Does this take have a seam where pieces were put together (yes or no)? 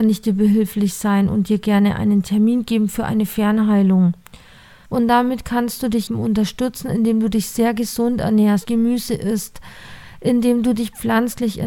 yes